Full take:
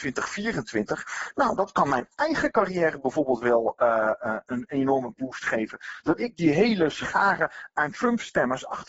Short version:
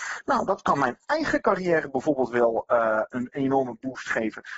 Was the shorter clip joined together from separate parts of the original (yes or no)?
yes